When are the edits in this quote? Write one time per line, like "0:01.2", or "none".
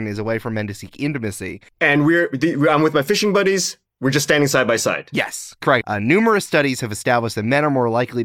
0:01.7
0:05.8

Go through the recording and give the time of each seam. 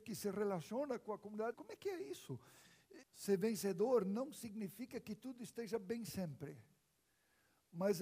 0:01.5
0:03.0

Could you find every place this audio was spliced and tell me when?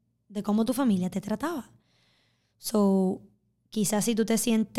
none

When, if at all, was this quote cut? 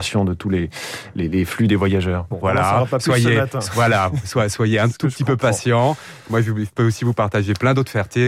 0:02.3

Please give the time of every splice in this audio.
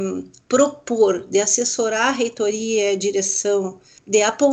none

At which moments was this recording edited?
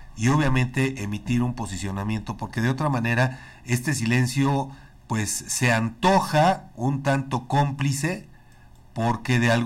none

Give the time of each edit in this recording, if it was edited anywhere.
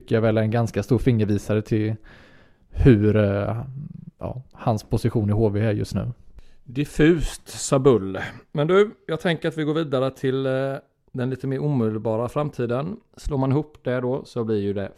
0:13.1

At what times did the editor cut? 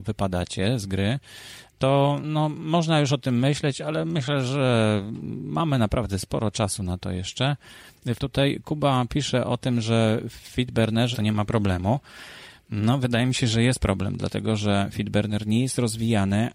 0:08.2
0:11.1

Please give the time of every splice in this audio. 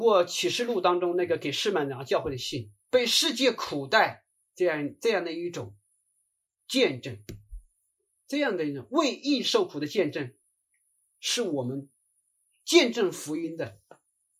0:02.8
0:04.5

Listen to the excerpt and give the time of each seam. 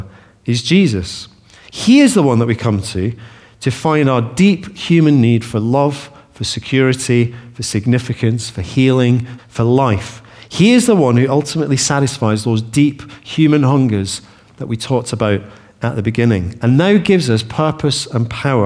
0:09.4

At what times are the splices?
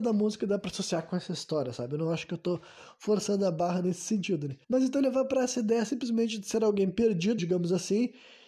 0:04.6
0:07.4

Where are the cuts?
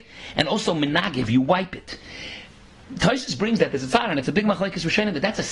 none

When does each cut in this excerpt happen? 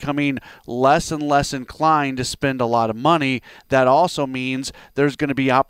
none

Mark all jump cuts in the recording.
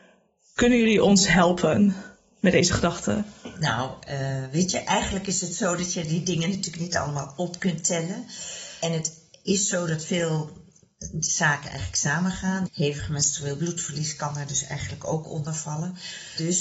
0:12.7

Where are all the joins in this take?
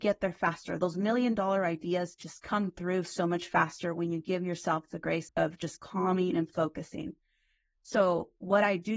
0:05.3

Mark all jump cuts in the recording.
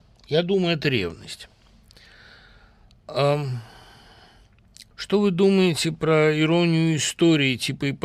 0:04.9

